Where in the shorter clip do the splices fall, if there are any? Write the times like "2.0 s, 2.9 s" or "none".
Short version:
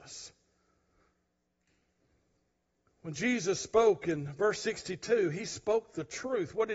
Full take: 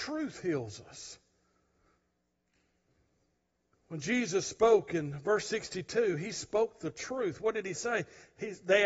none